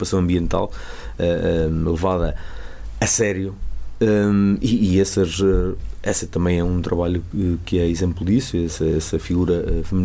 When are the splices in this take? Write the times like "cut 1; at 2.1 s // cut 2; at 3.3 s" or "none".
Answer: none